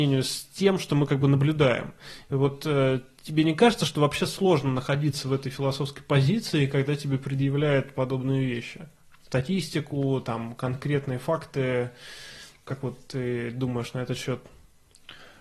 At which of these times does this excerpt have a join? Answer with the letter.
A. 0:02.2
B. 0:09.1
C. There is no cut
C